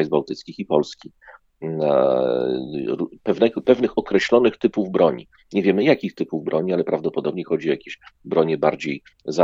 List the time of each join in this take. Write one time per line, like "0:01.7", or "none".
none